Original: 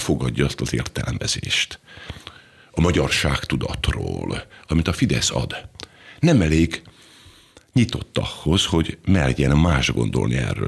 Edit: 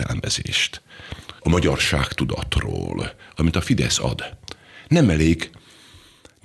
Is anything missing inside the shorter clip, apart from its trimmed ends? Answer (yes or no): yes